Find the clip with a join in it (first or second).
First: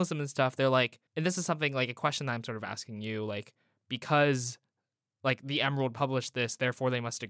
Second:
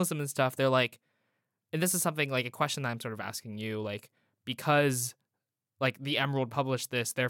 first